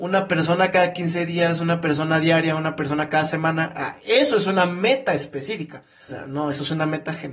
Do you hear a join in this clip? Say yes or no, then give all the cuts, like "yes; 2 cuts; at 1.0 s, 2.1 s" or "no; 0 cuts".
yes; 1 cut; at 6.1 s